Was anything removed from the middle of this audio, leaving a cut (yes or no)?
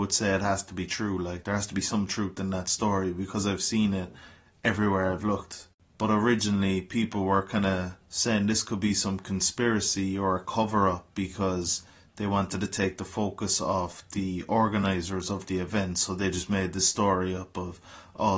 yes